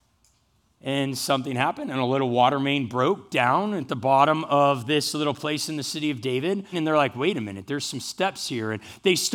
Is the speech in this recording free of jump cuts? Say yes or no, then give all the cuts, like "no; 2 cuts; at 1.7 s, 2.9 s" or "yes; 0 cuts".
no; 1 cut; at 6.7 s